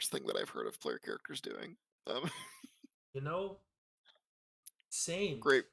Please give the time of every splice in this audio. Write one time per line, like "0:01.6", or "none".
0:02.9